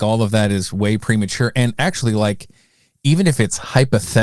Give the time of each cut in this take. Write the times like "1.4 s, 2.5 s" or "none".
none